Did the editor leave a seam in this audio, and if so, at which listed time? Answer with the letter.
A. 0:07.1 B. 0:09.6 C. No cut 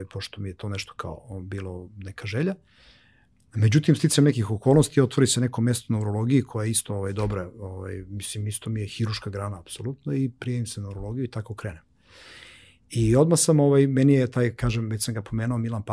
C